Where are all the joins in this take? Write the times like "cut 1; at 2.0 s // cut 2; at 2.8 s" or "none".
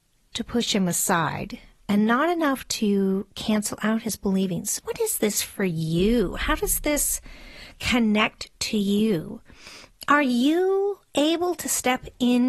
cut 1; at 4.8 s